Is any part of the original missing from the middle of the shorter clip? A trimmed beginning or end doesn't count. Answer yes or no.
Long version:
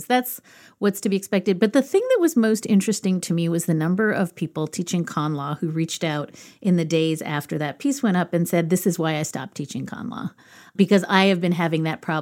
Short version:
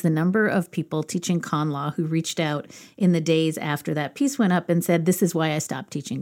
no